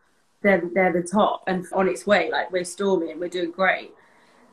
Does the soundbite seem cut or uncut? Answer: cut